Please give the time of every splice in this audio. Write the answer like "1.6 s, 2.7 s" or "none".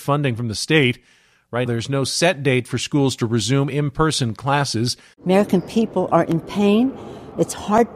1.7 s, 5.1 s

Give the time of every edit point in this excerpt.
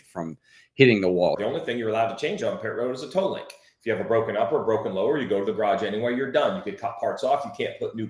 1.4 s

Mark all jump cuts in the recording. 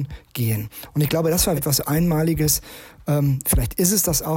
1.6 s

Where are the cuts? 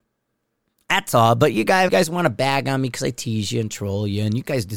1.9 s

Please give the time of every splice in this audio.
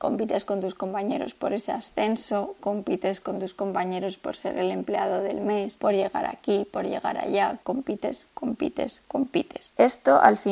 7.6 s

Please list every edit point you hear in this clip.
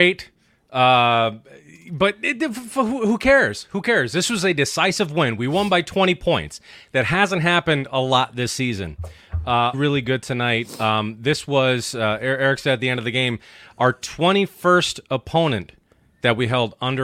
9.7 s

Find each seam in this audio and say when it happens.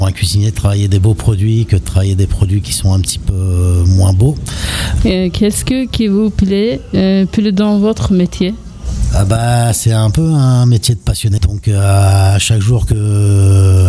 5.0 s, 11.4 s

